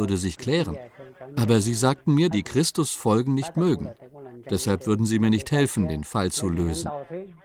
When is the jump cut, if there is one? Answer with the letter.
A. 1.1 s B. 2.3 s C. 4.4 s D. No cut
B